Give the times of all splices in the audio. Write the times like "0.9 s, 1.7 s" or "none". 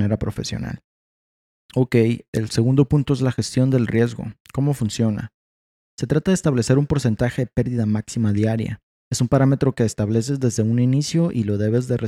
4.4 s, 9.0 s